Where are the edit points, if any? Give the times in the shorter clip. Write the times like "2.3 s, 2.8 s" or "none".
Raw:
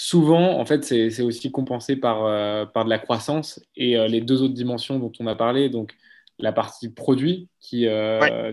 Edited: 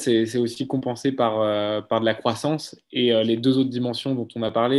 none